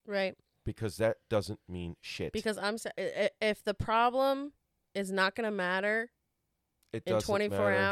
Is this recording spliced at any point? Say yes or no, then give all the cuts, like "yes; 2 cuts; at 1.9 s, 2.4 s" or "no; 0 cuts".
no; 0 cuts